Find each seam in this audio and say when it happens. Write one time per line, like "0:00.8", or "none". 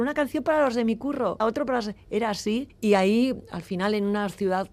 0:01.4
0:02.7